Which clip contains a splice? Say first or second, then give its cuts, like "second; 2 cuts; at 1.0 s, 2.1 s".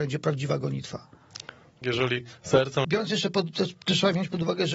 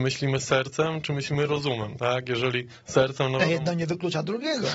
first; 2 cuts; at 1.8 s, 2.8 s